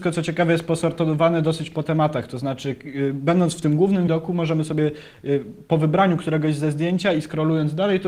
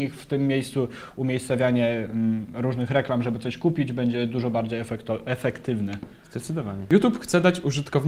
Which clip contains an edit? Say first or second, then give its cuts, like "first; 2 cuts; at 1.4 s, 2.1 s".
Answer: first; 1 cut; at 4.1 s